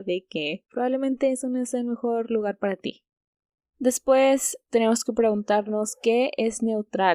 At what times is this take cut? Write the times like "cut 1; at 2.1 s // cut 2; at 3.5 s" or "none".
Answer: cut 1; at 3.7 s